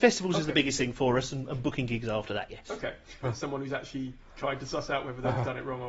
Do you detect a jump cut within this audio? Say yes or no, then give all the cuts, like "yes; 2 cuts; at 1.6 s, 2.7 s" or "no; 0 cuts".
yes; 1 cut; at 3.2 s